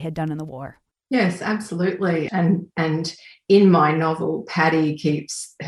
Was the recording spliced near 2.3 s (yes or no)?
yes